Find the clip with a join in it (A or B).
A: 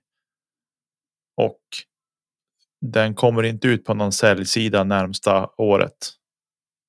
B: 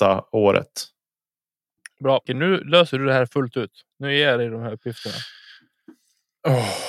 B